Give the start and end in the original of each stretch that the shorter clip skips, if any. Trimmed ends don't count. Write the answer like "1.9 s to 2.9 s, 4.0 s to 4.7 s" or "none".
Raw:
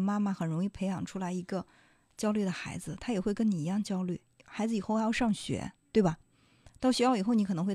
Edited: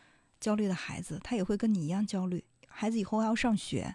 none